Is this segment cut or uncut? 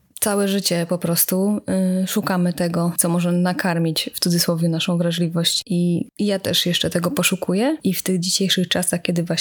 cut